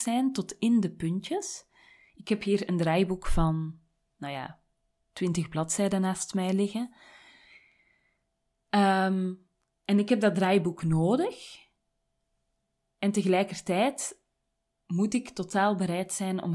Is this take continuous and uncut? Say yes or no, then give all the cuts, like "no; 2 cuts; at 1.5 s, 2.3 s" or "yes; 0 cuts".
yes; 0 cuts